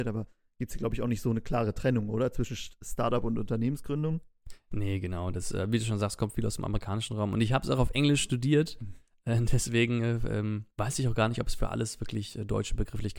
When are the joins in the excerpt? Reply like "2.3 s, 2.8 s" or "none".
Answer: 10.7 s

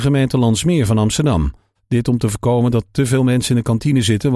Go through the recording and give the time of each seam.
1.8 s

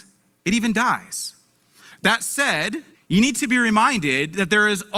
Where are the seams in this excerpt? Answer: 2.9 s

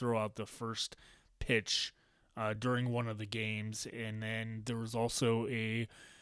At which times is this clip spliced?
none

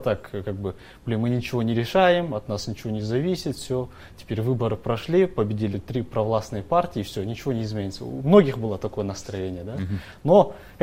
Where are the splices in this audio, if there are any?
5.7 s

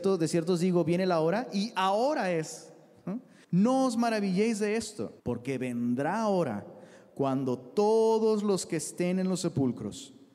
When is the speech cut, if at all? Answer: 3.4 s, 5.2 s

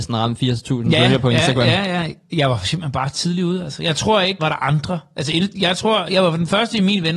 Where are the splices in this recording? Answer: 4.4 s

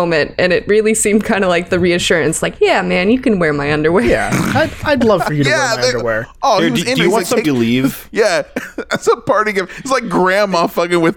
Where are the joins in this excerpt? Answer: 7.4 s

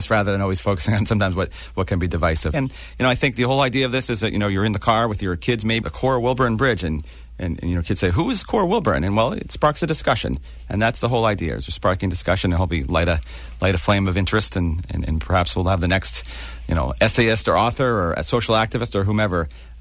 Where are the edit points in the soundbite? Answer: 2.5 s, 5.8 s

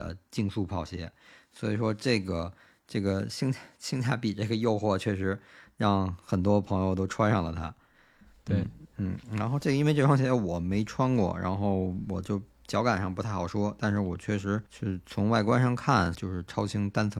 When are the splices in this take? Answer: 14.7 s, 16.1 s

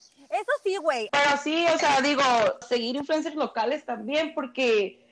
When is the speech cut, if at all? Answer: 1.1 s, 2.6 s

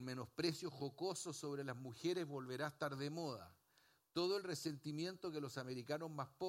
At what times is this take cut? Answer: none

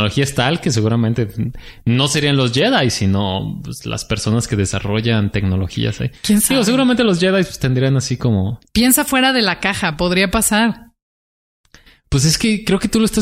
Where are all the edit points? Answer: none

